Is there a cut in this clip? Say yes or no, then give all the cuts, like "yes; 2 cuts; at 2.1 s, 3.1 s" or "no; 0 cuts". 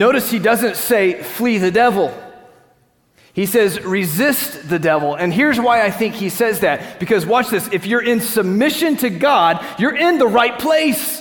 no; 0 cuts